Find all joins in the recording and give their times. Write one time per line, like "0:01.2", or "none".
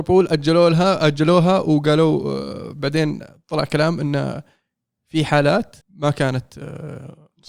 0:05.8